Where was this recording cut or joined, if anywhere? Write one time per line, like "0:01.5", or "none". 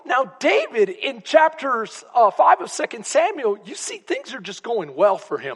none